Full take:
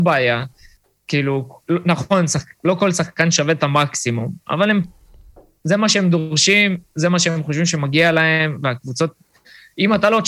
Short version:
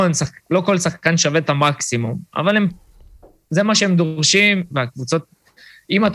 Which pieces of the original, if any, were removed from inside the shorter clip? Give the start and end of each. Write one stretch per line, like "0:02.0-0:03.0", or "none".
0:06.8-0:08.6